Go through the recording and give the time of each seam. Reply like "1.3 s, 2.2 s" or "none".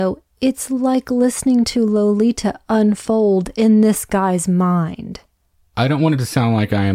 5.6 s